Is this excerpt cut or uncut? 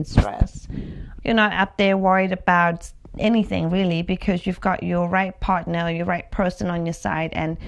cut